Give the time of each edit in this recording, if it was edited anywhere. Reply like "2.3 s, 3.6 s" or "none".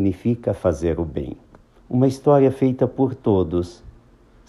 1.8 s

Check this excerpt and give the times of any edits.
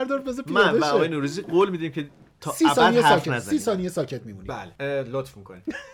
4.8 s

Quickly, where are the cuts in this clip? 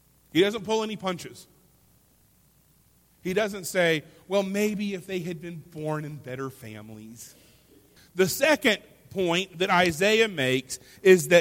8.0 s

